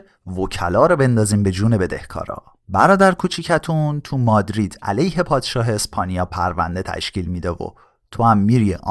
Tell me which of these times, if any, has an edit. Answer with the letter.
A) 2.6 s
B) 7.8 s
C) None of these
A